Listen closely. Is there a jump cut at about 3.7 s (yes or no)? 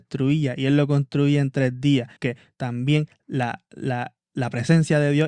no